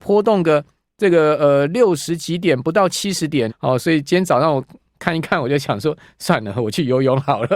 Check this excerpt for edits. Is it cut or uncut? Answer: cut